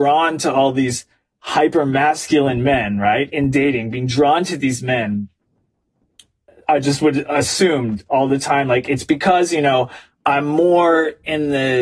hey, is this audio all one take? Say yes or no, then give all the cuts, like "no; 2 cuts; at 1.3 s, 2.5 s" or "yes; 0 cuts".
yes; 0 cuts